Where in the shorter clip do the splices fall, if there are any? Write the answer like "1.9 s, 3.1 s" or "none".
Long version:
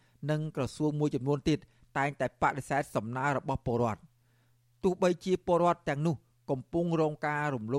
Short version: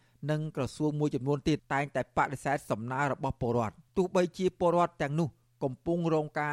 1.6 s, 3.9 s